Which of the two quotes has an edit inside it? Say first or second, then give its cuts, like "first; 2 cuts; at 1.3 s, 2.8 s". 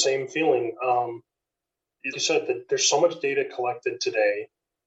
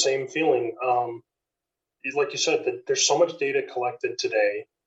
first; 1 cut; at 2.1 s